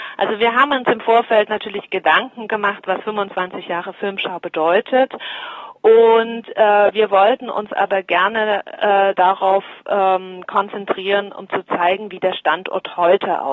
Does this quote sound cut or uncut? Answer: uncut